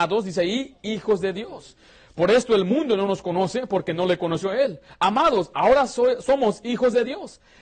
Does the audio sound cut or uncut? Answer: uncut